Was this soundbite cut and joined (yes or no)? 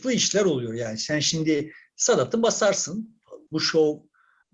yes